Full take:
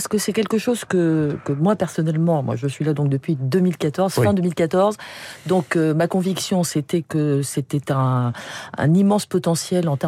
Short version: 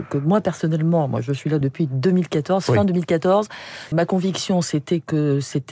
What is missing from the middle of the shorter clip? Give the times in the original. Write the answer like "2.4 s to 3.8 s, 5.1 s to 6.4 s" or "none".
3.0 s to 3.1 s, 5.4 s to 5.9 s